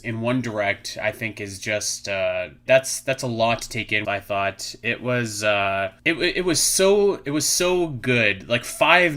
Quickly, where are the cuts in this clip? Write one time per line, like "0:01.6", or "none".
0:02.7
0:04.0
0:06.0